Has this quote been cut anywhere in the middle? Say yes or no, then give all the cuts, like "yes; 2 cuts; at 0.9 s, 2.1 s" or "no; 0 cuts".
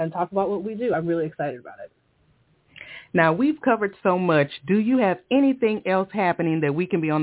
no; 0 cuts